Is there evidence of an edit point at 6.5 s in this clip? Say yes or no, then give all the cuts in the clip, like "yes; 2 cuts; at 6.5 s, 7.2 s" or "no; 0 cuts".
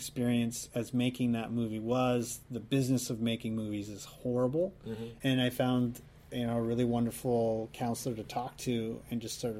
no; 1 cut; at 5.2 s